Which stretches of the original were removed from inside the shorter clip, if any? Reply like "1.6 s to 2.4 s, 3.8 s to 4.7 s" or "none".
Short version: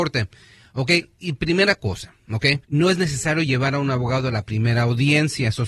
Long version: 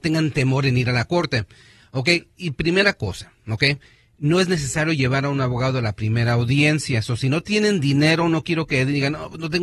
3.8 s to 4.1 s